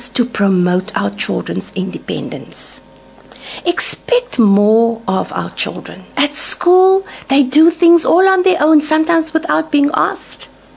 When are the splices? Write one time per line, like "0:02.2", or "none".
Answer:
0:06.1